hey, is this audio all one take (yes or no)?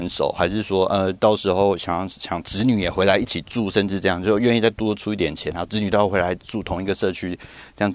yes